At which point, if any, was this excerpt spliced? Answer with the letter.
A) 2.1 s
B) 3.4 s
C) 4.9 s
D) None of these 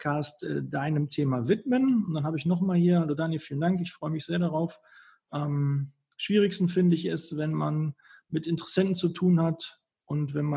D